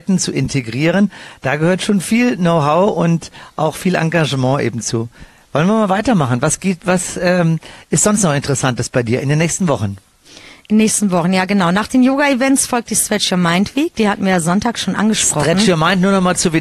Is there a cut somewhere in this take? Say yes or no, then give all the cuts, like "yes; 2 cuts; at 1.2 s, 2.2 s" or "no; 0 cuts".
no; 0 cuts